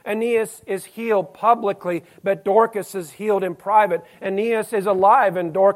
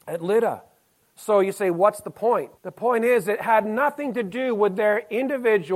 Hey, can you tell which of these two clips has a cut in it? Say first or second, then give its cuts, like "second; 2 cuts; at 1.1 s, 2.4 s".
second; 2 cuts; at 1.0 s, 2.6 s